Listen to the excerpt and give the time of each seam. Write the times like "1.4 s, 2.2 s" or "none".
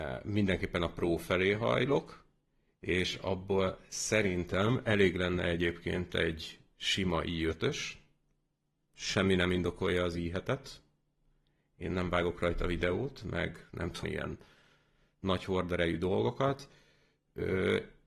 14.0 s

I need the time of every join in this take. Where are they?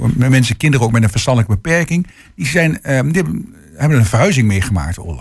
none

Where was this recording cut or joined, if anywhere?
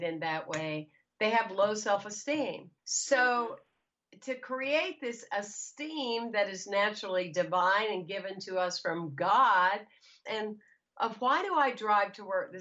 2.8 s, 10.3 s

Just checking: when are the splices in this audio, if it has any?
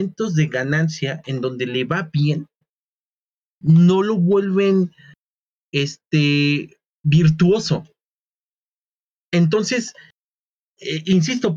none

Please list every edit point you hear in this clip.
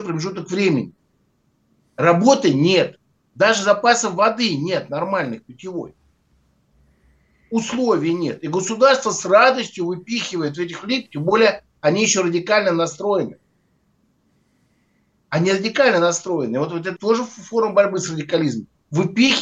17.0 s

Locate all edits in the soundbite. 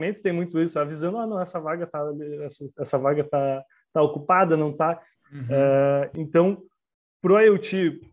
5.2 s

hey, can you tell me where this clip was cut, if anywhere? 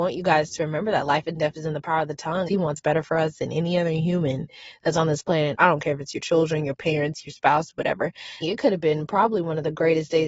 2.5 s, 5.5 s, 8.4 s

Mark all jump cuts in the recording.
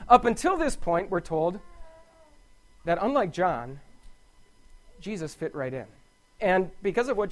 6.4 s

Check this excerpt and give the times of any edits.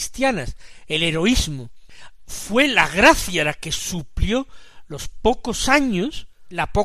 none

